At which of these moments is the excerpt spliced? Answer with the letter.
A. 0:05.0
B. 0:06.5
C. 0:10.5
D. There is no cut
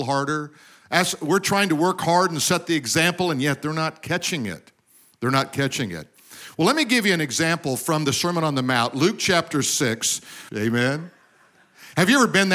C